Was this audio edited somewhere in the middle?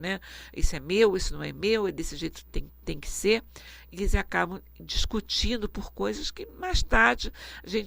no; 0 cuts

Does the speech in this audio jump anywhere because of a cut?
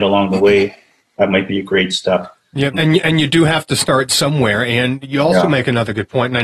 yes; 1 cut; at 2.7 s

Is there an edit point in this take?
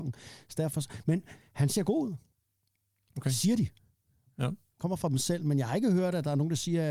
no; 0 cuts

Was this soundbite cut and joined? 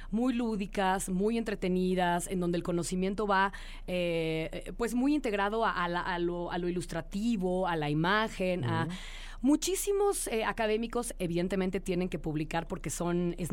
no; 0 cuts

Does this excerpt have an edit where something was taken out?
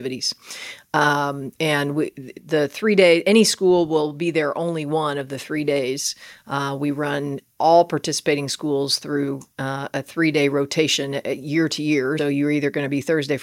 yes; 1 cut; at 12.2 s

